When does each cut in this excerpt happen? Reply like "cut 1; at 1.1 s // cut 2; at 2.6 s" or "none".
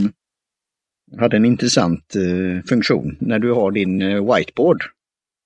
none